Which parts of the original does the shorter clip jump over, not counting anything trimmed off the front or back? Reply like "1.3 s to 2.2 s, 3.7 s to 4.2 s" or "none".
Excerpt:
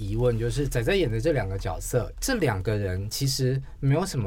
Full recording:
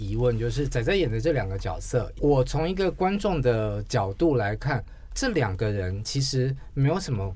2.1 s to 5.1 s